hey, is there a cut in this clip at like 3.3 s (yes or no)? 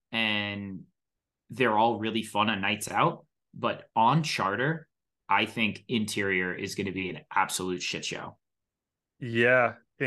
no